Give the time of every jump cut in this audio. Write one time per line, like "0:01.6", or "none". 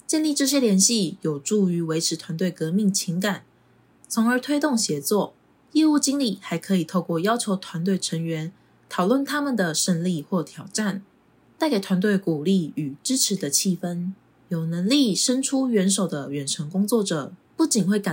none

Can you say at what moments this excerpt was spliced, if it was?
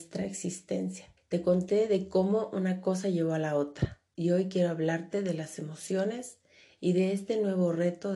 0:01.2

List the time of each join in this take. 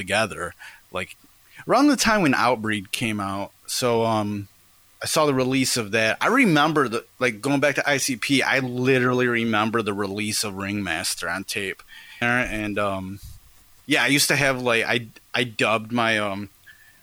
0:12.2

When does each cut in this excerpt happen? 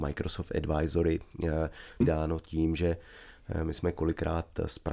0:02.0

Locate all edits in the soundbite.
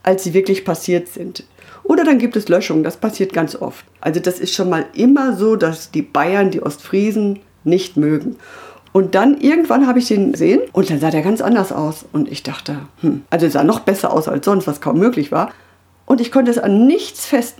0:04.0
0:08.8

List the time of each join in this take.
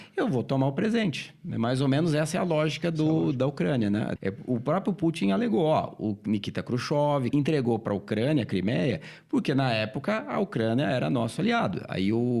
0:04.2
0:07.3

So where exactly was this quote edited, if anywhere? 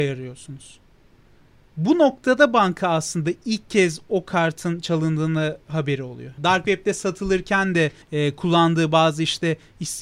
0:06.4
0:08.0

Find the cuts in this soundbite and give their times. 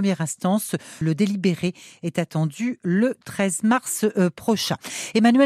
0:01.0

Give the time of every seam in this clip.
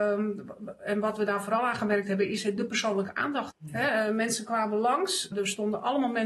0:03.5
0:05.3

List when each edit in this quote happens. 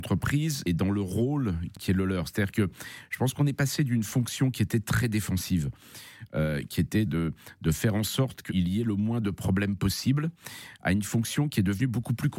0:07.1
0:08.5

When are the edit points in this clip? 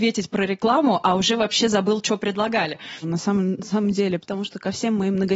0:03.0
0:04.2

